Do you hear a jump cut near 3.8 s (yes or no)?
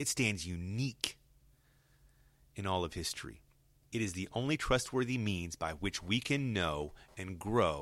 yes